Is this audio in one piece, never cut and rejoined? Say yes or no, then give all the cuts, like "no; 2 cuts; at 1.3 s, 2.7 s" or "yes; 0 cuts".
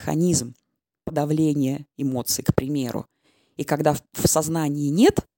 yes; 0 cuts